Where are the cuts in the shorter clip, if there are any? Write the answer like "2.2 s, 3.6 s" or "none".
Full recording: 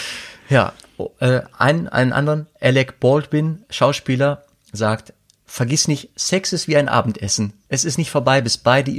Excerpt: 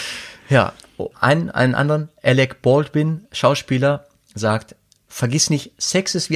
1.1 s